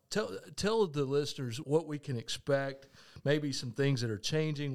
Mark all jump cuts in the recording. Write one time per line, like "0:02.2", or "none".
0:01.6